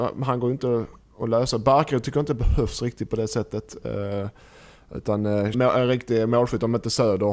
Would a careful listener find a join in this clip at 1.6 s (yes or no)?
no